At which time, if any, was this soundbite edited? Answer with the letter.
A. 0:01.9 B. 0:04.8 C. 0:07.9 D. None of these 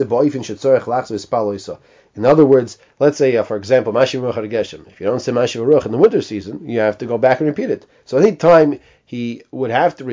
D